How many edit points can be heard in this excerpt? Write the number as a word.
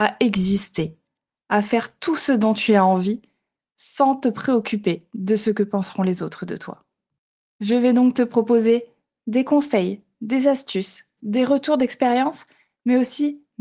zero